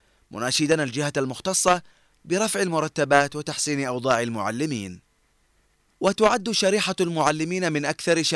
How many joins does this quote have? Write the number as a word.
zero